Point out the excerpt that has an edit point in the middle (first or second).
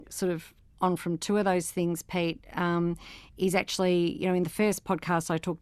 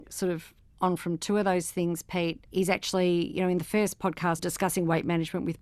second